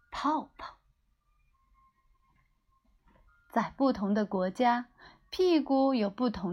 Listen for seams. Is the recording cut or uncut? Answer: uncut